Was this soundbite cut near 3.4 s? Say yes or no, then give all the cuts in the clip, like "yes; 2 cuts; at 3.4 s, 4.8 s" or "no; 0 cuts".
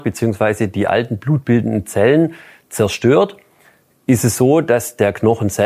no; 0 cuts